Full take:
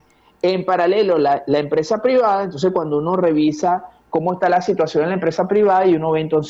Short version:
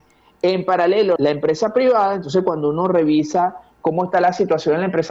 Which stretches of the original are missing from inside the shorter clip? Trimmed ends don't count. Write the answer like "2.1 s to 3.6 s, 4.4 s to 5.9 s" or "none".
1.2 s to 1.4 s